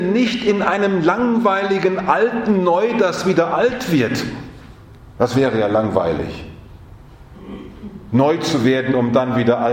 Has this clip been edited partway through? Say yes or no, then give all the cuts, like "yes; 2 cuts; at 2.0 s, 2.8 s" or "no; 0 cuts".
no; 0 cuts